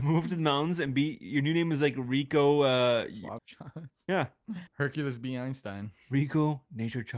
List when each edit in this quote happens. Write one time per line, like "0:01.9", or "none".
0:03.4
0:04.7